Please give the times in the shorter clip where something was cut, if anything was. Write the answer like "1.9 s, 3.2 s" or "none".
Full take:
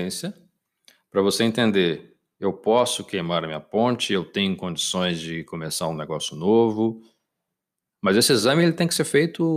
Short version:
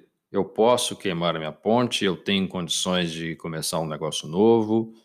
none

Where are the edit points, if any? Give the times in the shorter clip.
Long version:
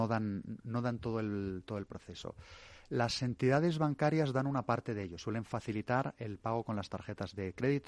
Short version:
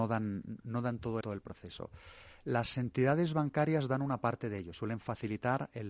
1.2 s

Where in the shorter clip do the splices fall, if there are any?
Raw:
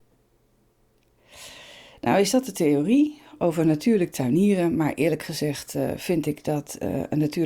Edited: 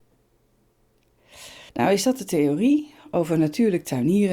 1.7 s

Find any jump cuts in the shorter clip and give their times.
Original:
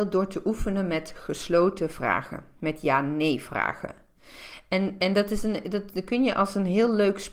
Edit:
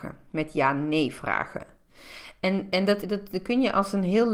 3.0 s

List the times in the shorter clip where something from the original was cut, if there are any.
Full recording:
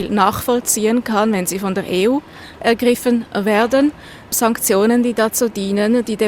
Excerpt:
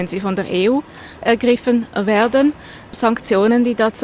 none

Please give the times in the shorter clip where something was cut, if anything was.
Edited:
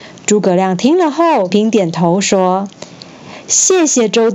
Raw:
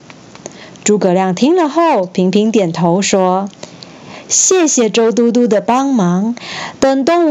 1.5 s

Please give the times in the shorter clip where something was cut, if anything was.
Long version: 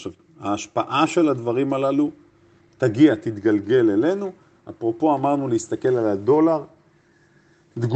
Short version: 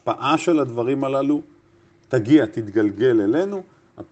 none

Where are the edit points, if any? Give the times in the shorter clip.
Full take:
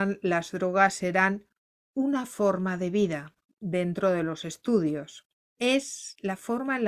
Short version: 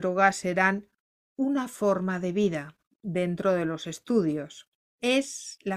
none

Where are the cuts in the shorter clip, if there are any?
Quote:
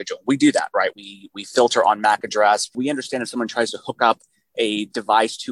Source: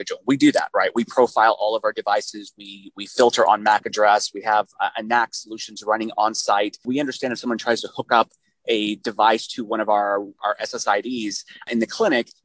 0.9 s, 2.7 s

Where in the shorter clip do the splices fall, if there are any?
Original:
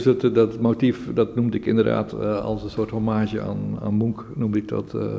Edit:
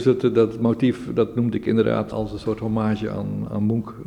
2.1 s

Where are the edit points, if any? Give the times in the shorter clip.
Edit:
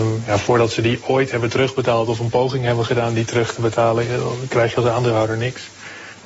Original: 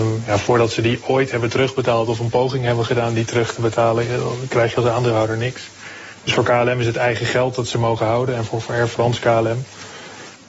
none

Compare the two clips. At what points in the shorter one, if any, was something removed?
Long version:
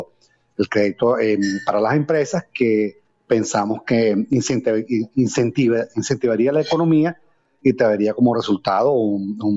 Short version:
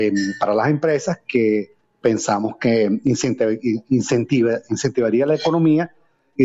none

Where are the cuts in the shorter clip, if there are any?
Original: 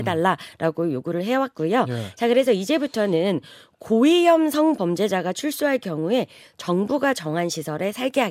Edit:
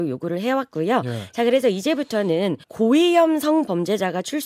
2.6 s

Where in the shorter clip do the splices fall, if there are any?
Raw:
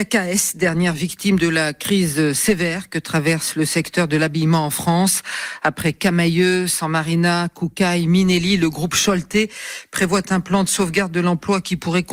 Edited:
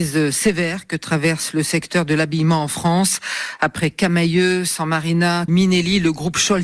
5.5 s

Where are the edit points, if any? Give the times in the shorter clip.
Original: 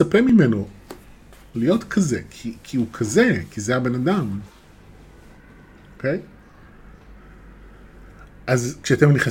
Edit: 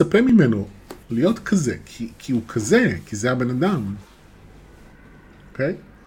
1.0 s

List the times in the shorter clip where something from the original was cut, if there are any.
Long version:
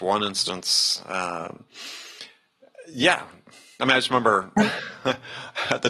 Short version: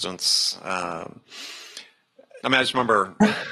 2.4 s

